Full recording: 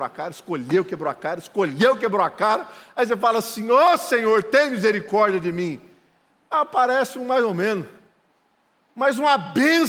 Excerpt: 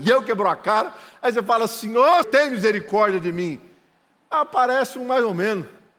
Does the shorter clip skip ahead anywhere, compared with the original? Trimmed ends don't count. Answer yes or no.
yes